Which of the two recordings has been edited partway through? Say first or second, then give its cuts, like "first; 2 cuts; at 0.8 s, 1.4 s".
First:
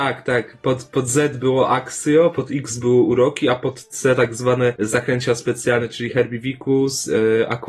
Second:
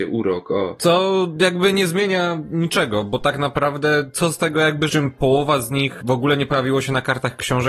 second; 1 cut; at 4.9 s